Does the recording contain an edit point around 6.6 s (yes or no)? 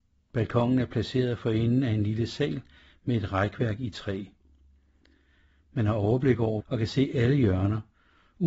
yes